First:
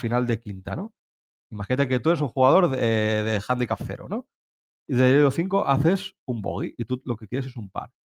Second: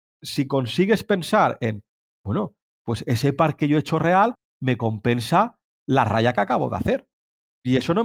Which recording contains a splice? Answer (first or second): second